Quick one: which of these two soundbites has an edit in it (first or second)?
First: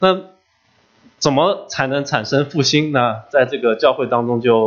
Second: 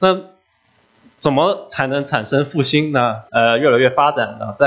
second